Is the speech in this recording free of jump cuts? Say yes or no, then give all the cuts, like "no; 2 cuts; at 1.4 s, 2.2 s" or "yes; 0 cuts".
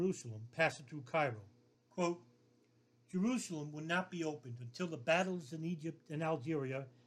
no; 1 cut; at 1.7 s